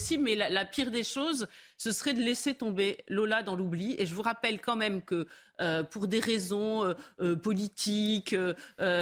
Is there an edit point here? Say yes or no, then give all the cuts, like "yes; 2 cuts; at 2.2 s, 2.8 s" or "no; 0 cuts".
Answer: no; 0 cuts